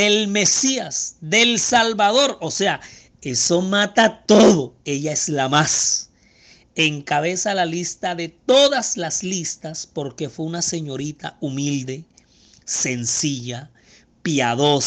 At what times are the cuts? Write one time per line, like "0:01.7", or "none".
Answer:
none